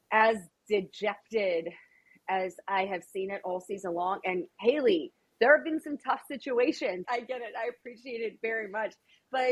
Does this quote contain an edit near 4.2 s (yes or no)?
no